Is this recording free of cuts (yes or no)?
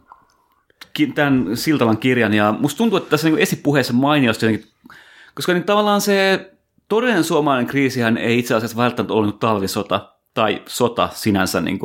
yes